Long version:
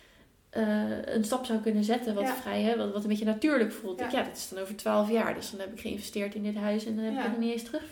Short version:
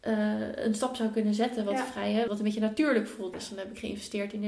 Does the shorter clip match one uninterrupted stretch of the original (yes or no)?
no